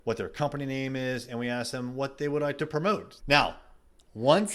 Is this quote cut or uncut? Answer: cut